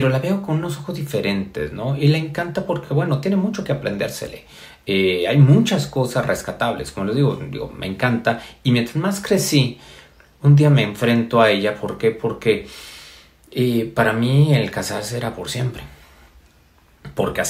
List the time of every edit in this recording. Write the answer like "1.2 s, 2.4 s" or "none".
none